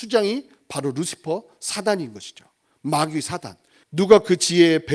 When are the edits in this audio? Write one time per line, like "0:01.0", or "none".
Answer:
0:03.8